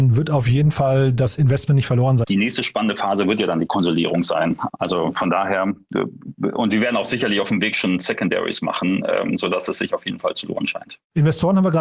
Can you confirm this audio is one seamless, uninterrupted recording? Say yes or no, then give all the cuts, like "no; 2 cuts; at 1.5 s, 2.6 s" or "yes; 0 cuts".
no; 2 cuts; at 2.2 s, 4.7 s